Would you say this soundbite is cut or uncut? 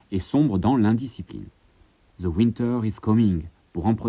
cut